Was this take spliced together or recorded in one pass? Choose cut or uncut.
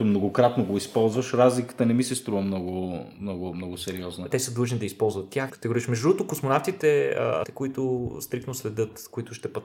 cut